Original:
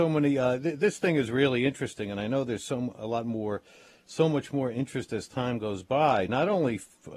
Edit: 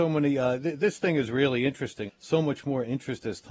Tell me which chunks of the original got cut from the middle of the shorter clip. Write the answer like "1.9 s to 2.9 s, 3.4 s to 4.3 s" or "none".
2.1 s to 3.9 s

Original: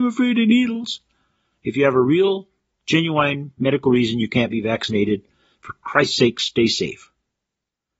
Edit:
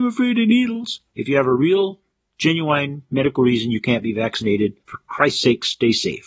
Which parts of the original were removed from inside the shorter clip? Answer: 1.1 s to 1.6 s, 5.3 s to 5.5 s

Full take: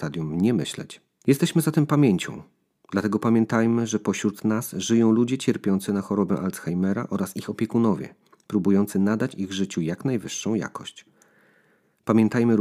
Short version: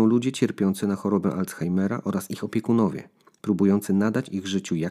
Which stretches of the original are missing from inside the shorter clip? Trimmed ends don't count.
none

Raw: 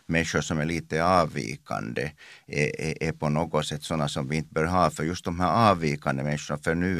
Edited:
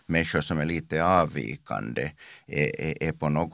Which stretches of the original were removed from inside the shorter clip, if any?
none

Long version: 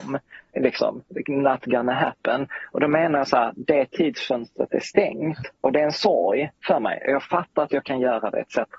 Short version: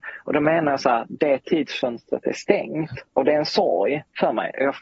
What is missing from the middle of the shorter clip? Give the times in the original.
none

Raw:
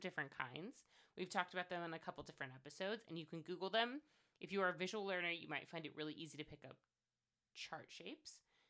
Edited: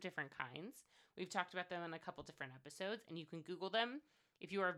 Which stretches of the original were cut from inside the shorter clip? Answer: none

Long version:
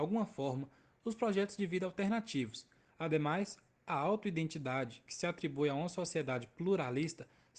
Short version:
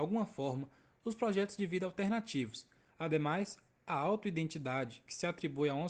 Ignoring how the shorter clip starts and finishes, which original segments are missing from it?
none

